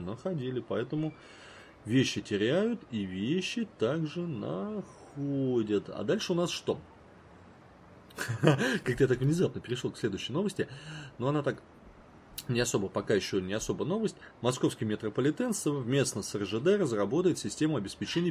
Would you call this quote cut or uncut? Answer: uncut